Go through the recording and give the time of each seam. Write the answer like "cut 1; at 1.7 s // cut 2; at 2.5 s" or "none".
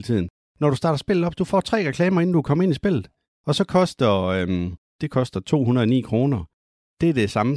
cut 1; at 3.2 s // cut 2; at 5.0 s